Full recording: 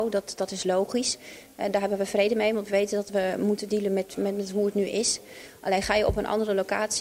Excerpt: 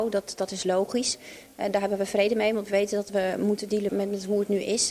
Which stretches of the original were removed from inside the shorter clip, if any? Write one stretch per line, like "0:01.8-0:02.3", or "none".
0:03.9-0:04.1